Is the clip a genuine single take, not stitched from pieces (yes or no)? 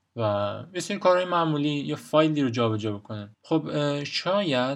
no